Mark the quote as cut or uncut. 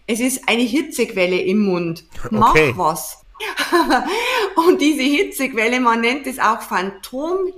uncut